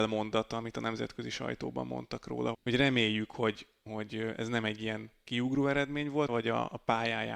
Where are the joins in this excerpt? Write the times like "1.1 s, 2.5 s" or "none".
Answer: 2.5 s, 6.3 s